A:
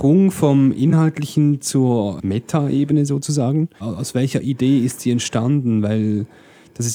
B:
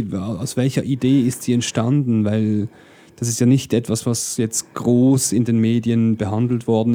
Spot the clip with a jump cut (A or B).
A